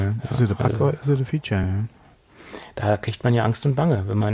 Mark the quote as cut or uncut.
uncut